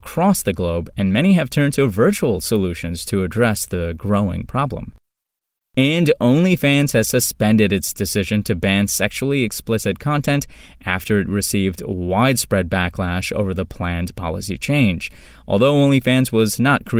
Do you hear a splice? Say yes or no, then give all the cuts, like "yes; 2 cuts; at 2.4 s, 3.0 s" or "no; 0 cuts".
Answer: no; 0 cuts